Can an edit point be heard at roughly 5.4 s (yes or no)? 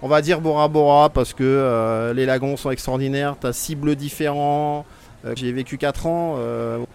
yes